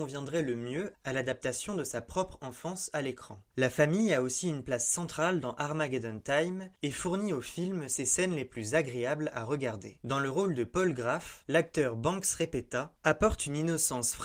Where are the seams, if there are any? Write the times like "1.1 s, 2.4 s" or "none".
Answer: 3.5 s, 11.4 s